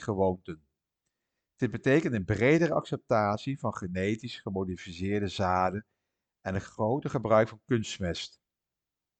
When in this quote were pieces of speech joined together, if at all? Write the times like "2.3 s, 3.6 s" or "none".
none